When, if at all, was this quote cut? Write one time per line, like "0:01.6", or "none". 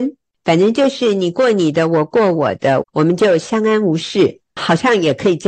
0:02.8